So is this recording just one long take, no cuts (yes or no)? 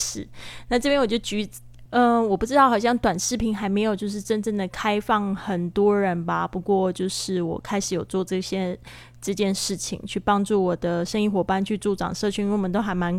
no